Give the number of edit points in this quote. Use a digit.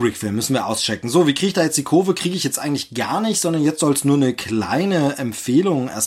0